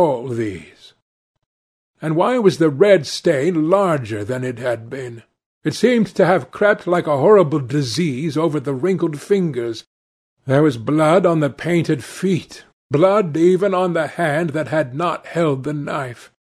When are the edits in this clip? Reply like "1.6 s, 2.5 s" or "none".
12.7 s

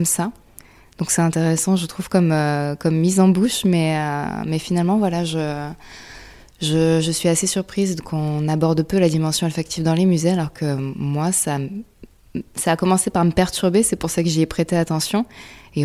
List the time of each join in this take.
none

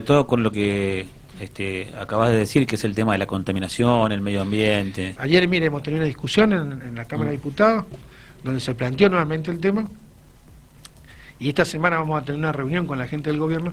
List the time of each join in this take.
5.2 s

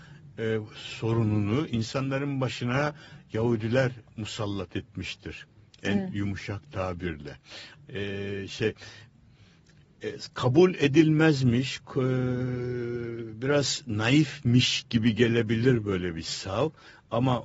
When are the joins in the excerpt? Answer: 7.7 s

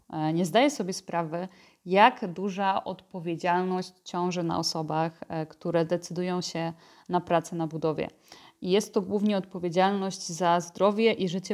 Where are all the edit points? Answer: none

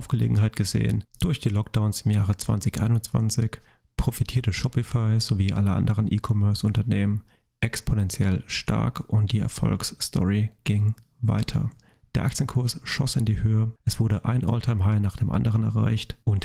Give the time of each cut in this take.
1.0 s

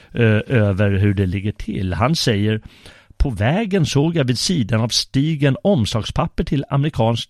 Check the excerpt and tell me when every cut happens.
none

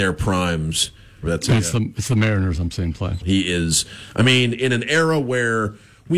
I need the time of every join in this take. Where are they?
1.2 s, 3.2 s

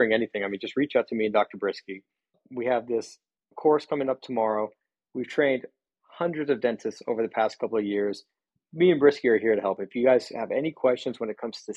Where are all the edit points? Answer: none

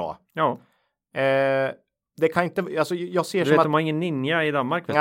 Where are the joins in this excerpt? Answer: none

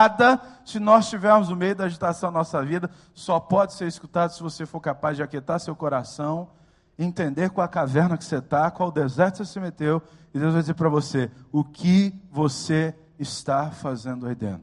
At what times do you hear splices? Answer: none

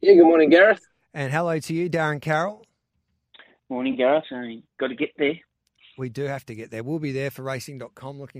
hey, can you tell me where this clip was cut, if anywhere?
4.2 s

